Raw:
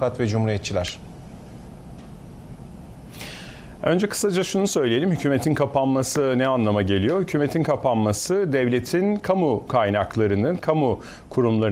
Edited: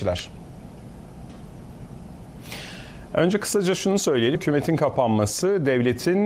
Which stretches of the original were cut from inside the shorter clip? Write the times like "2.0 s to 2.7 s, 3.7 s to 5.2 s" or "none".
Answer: 5.0 s to 7.2 s